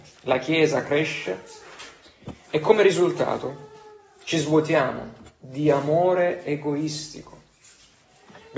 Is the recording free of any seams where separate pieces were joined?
yes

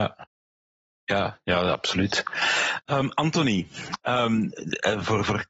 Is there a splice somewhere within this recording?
no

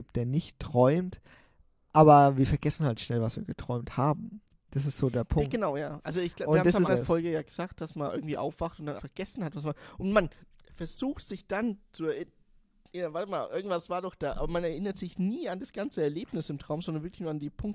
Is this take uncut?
no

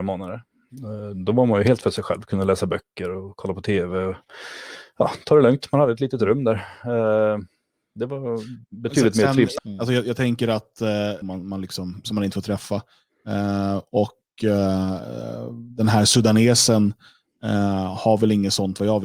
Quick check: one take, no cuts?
no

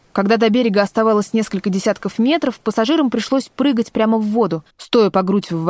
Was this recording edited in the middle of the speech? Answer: yes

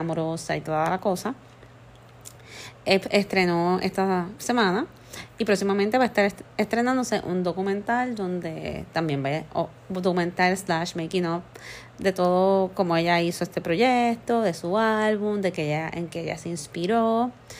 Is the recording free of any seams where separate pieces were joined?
yes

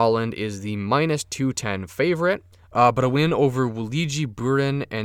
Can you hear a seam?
yes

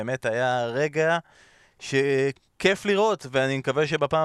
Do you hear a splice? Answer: no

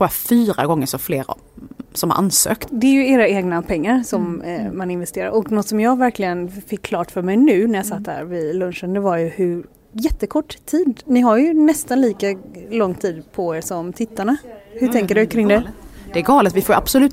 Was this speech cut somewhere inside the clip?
yes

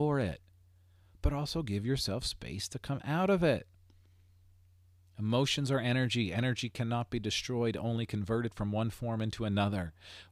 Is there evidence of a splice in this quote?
no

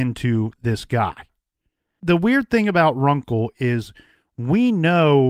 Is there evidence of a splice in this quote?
no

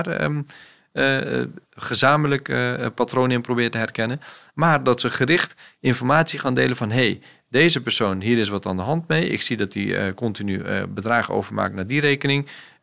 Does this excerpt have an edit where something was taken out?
no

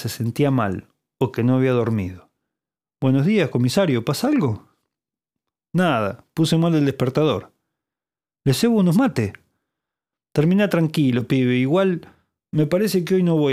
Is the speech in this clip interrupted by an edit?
no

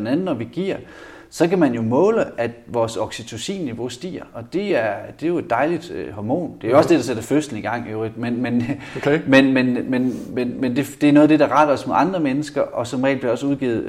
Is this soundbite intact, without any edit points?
yes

